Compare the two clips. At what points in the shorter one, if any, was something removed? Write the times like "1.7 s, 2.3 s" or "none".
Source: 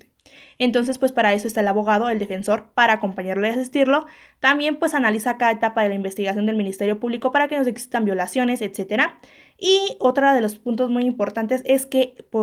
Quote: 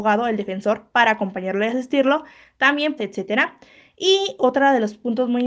3.0 s